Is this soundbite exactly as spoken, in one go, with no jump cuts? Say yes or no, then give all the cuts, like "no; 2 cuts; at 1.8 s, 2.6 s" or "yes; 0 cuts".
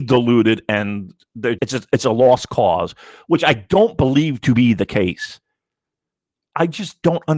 no; 1 cut; at 1.6 s